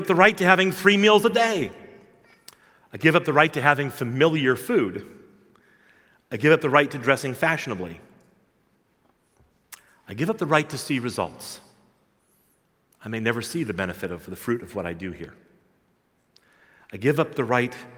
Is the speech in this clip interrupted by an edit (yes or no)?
no